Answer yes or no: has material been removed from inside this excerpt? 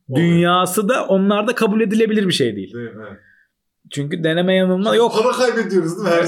no